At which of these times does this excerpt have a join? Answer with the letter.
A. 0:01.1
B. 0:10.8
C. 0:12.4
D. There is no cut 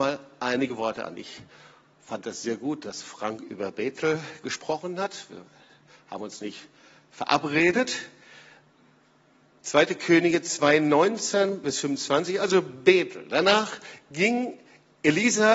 D